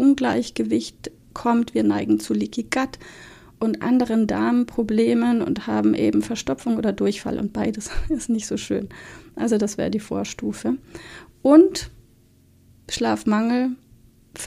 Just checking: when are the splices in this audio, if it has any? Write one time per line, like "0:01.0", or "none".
none